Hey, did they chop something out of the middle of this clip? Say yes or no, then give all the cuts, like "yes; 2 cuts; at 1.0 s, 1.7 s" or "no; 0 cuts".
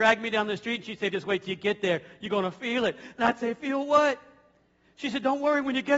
yes; 1 cut; at 1.1 s